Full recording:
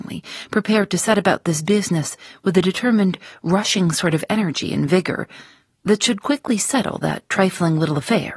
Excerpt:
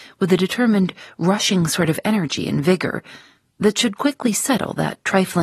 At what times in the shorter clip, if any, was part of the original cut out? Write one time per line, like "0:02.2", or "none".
none

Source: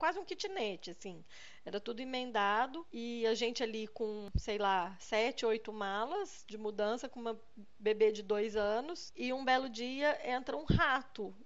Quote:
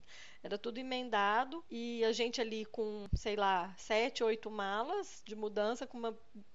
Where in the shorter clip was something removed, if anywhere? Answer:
none

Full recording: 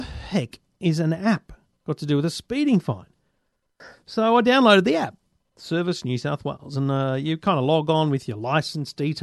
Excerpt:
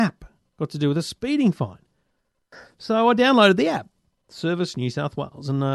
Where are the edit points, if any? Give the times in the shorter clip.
none

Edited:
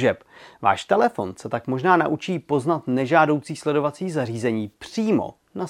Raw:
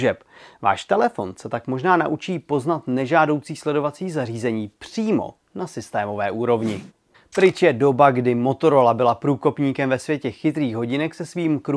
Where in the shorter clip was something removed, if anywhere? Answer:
none

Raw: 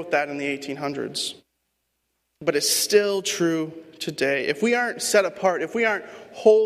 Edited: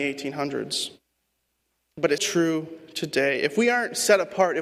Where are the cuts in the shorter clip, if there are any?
0:02.2

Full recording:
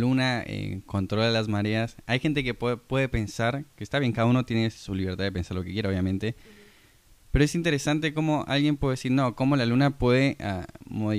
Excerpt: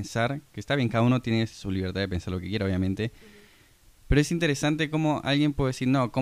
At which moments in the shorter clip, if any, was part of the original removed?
none

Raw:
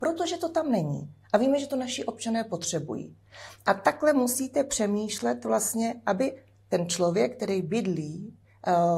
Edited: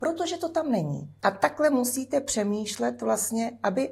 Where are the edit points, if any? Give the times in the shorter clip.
0:01.2

